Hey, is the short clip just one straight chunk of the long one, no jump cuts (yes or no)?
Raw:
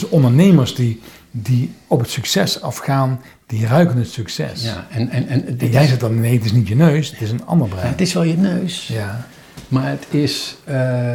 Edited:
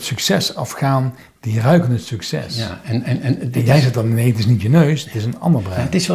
yes